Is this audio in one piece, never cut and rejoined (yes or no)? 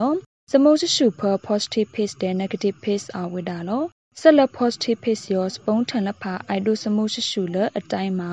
yes